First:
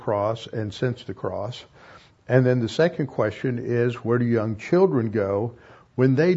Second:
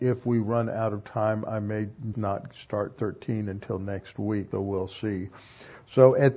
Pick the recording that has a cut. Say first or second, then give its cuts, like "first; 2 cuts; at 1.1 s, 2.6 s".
second; 2 cuts; at 2.1 s, 4.5 s